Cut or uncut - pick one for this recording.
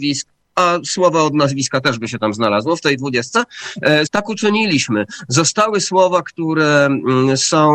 cut